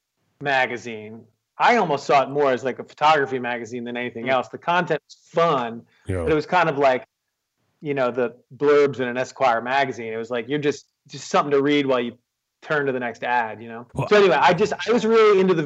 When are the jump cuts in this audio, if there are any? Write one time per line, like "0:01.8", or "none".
0:13.9